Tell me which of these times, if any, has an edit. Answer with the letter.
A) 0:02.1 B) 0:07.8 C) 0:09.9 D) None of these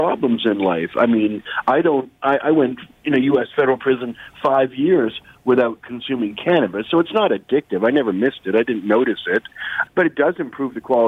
C